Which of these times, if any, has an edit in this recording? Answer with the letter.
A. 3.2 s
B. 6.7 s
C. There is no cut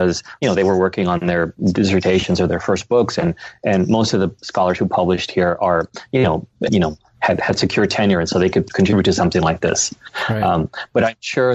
B